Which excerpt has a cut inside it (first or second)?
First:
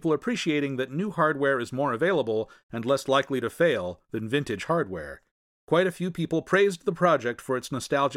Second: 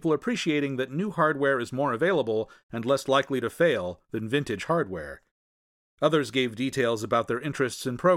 first